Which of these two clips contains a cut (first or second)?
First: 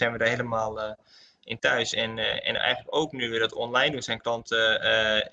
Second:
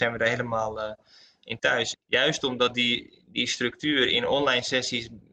second